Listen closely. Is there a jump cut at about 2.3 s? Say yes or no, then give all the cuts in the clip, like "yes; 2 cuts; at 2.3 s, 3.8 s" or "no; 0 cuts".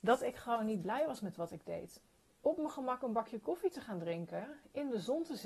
yes; 1 cut; at 2.3 s